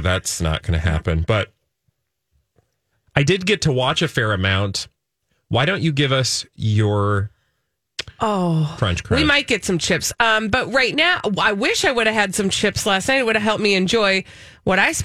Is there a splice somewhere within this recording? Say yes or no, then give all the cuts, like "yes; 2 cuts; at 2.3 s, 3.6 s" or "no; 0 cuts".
yes; 1 cut; at 8.8 s